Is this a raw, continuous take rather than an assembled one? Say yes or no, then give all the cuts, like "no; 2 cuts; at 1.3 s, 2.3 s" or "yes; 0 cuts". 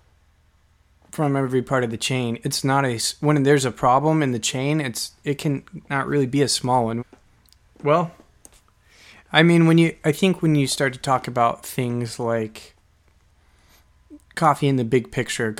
no; 1 cut; at 7.0 s